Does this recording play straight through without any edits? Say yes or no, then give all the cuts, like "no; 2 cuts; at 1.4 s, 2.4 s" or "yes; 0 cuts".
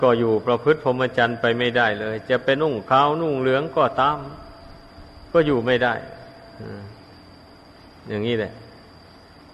no; 1 cut; at 2.6 s